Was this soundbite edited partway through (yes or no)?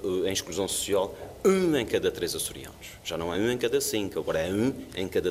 no